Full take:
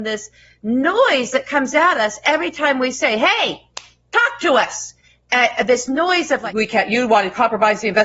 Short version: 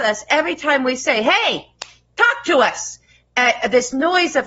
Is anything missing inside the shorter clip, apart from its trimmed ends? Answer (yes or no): no